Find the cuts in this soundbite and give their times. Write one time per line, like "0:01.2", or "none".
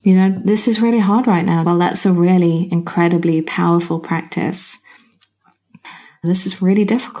0:01.6
0:06.2